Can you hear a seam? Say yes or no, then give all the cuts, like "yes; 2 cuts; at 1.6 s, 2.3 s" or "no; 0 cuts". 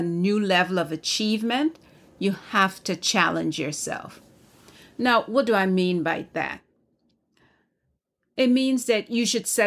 no; 0 cuts